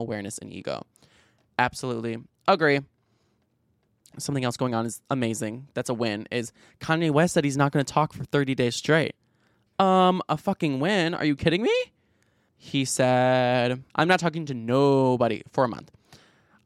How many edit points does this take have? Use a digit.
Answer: 2